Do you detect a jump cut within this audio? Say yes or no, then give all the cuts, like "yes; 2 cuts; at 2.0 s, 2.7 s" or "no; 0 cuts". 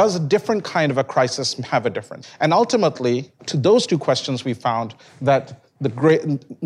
yes; 2 cuts; at 2.2 s, 3.4 s